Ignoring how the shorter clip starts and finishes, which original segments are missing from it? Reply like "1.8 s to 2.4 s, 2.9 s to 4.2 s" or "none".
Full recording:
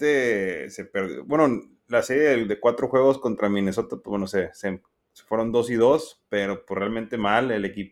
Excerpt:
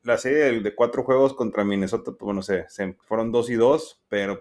4.9 s to 5.2 s